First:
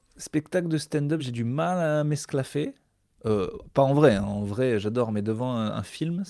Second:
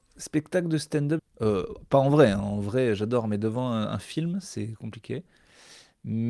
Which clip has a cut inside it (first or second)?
second